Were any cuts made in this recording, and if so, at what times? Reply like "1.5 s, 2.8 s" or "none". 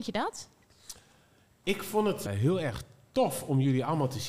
2.3 s